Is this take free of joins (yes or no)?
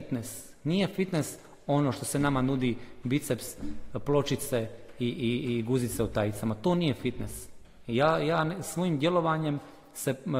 yes